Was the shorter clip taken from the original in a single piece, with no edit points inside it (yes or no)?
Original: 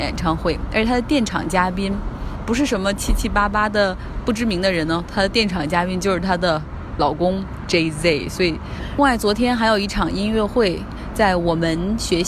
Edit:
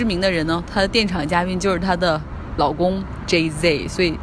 yes